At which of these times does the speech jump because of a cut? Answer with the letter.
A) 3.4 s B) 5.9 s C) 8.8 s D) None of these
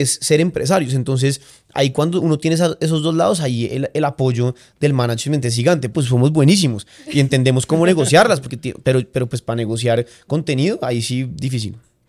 B